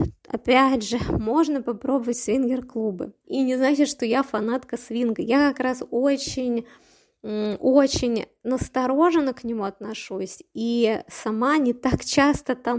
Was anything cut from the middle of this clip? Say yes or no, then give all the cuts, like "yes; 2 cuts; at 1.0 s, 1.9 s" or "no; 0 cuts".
yes; 1 cut; at 3.2 s